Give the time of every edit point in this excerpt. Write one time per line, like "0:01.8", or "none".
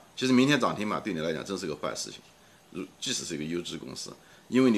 none